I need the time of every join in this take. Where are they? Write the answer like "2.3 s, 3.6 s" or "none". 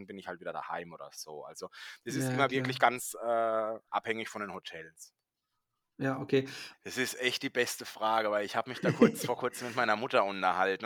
6.7 s